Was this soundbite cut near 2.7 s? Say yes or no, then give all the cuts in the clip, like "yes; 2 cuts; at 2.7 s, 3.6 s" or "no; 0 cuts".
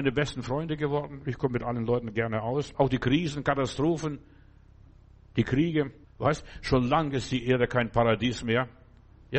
yes; 2 cuts; at 2.7 s, 6.0 s